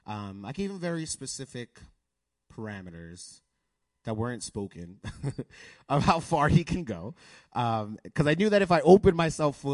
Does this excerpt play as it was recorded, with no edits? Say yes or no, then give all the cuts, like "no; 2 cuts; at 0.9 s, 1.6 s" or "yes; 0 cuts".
yes; 0 cuts